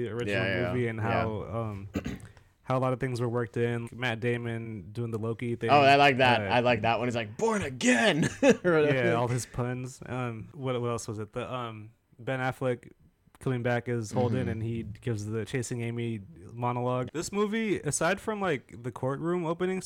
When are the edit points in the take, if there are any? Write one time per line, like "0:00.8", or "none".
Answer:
0:03.8
0:17.1